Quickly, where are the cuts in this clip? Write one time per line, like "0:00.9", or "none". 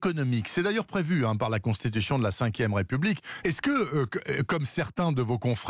0:03.4

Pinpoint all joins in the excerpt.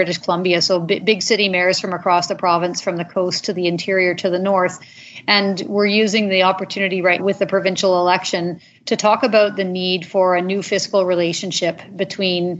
0:07.2

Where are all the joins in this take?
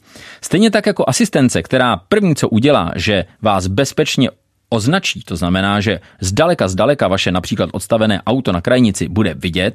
none

